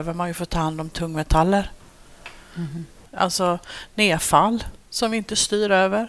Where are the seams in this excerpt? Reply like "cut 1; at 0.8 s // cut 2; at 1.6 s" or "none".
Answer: cut 1; at 3.1 s